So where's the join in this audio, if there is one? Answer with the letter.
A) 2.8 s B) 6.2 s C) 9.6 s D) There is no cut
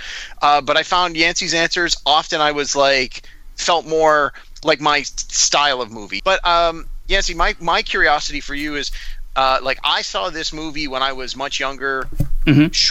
B